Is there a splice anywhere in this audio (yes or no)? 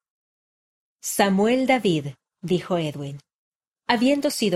no